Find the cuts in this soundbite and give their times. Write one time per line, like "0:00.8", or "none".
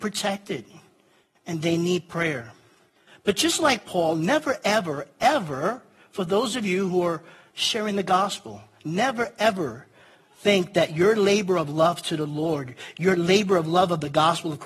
none